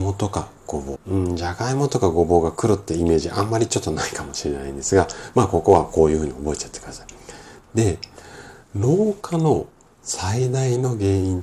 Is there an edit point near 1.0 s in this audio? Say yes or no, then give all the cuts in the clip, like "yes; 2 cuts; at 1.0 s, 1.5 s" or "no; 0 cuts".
yes; 1 cut; at 1.0 s